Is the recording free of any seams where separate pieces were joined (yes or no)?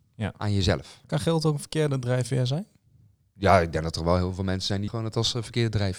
no